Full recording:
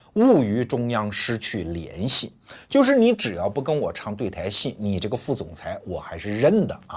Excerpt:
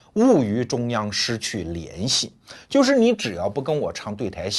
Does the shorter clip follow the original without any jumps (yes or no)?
yes